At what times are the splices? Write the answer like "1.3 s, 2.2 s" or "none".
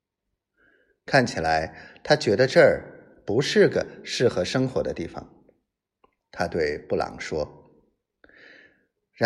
6.2 s